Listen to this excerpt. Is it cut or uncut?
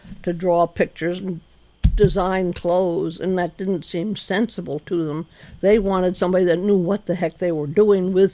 uncut